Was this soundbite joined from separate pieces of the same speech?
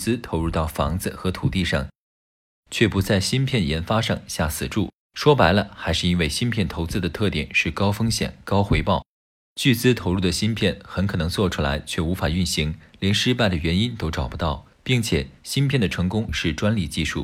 yes; 1 cut; at 14.7 s

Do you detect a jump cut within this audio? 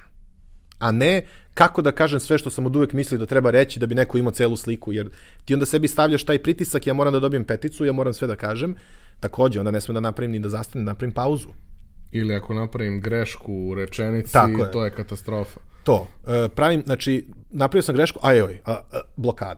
no; 0 cuts

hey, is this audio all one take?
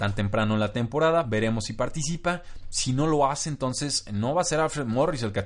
yes; 0 cuts

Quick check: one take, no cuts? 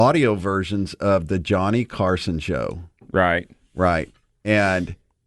yes; 0 cuts

